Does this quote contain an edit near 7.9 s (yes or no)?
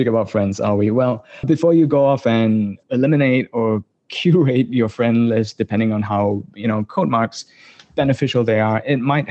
no